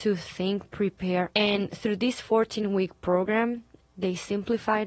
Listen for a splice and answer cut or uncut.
cut